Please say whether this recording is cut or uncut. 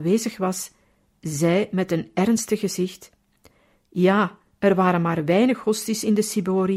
uncut